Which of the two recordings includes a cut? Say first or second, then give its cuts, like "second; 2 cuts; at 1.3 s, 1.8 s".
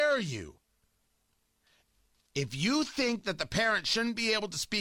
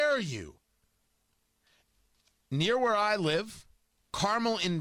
first; 1 cut; at 2.3 s